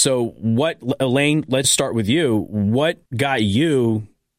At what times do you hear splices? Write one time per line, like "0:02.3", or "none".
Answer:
0:01.6
0:03.1